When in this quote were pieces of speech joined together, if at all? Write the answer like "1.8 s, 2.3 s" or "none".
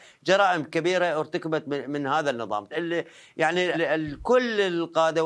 2.7 s, 3.7 s